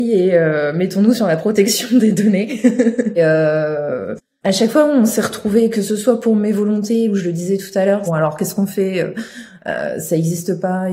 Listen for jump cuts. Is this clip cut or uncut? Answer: cut